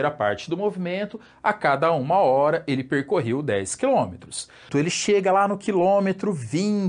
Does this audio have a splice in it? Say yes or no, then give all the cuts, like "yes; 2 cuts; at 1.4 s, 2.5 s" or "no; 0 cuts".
yes; 1 cut; at 4.7 s